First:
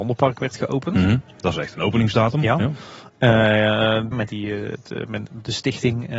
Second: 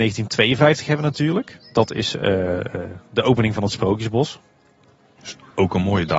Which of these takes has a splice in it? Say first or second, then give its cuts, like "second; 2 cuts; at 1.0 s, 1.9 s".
first; 1 cut; at 4.1 s